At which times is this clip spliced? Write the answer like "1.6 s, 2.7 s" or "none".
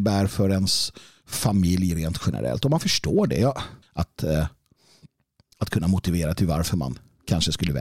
3.8 s